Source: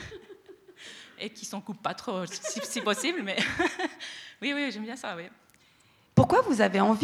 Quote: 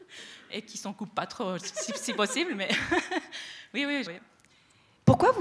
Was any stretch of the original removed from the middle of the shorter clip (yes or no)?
yes